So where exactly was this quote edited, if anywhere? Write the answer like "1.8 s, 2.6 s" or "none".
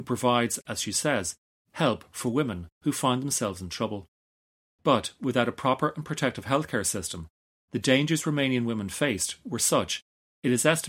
4.7 s